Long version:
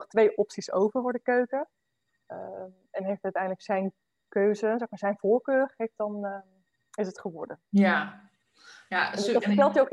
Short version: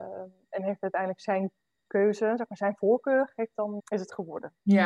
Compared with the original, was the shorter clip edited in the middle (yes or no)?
yes